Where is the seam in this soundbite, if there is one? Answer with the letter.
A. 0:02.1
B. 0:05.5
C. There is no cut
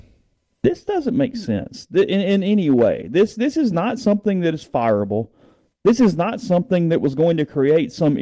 C